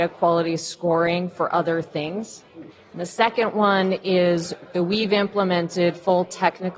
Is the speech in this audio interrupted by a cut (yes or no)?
yes